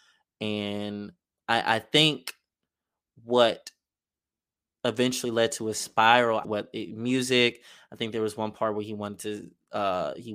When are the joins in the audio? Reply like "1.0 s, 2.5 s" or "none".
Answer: 6.4 s